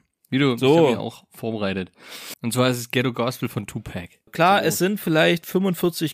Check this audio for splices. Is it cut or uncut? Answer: cut